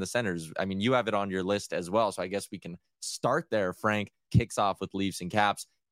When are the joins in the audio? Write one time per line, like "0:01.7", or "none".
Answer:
0:04.3